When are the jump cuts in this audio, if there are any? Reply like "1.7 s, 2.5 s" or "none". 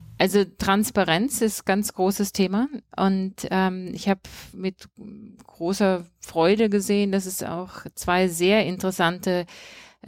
none